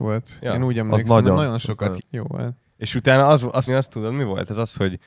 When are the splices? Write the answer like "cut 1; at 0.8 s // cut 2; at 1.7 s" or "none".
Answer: cut 1; at 2.0 s // cut 2; at 3.7 s